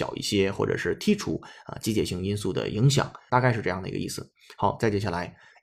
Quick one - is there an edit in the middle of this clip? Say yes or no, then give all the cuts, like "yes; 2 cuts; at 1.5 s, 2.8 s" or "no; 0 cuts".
yes; 1 cut; at 3.3 s